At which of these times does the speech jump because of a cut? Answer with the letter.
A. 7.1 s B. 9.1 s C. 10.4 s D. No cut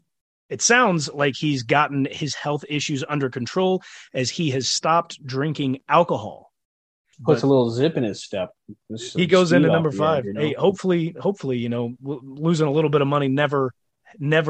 A